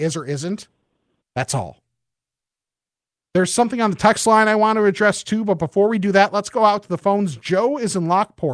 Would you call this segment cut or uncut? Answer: cut